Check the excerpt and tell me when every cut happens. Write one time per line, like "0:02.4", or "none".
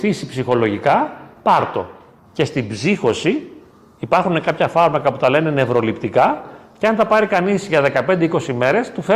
0:02.2